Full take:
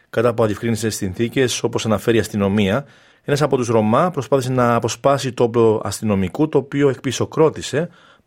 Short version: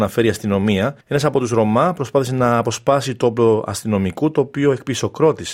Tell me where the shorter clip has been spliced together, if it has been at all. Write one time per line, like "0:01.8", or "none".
0:01.0